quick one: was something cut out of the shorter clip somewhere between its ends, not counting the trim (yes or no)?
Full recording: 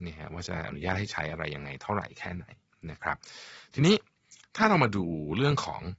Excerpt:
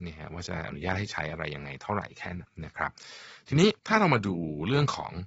yes